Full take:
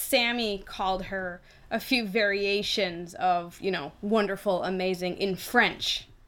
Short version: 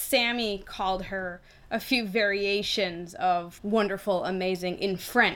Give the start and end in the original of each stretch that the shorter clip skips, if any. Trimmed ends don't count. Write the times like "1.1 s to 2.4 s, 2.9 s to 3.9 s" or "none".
3.6 s to 4.0 s